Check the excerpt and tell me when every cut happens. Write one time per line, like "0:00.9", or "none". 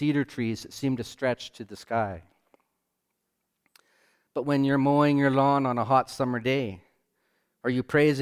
none